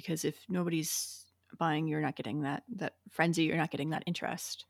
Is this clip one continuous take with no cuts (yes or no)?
yes